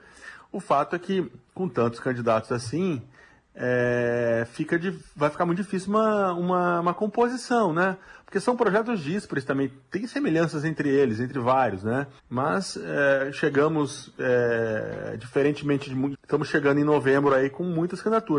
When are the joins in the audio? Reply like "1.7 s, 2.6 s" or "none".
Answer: 12.2 s, 16.1 s